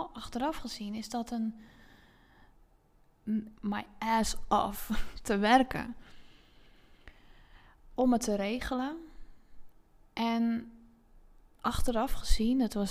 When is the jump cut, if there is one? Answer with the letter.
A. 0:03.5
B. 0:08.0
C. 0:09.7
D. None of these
A